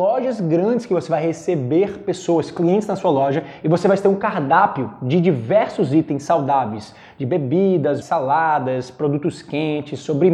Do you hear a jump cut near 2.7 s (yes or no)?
no